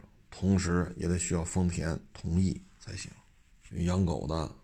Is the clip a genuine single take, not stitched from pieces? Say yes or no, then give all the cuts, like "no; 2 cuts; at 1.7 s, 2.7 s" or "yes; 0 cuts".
no; 1 cut; at 3.7 s